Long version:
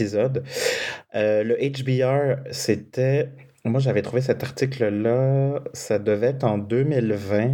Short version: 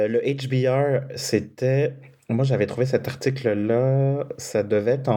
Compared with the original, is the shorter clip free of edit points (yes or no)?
yes